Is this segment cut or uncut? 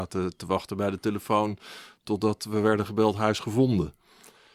uncut